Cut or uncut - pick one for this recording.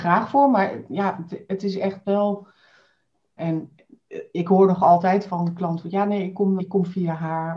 cut